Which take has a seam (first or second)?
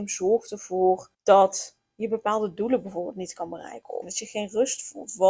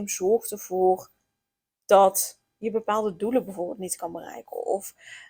first